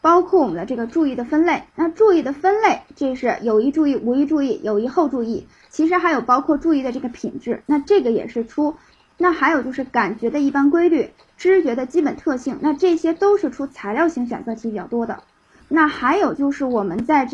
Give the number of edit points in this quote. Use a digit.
2